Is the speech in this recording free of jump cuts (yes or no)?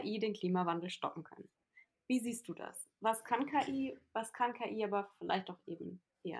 yes